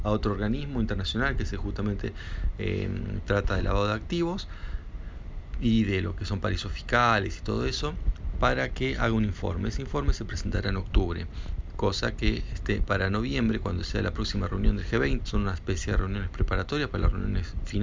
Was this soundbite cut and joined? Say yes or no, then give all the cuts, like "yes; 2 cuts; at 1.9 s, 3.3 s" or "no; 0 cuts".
yes; 1 cut; at 15.2 s